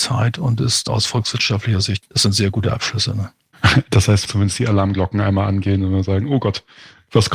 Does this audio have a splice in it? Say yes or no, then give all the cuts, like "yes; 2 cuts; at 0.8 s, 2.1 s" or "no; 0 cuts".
yes; 1 cut; at 4.3 s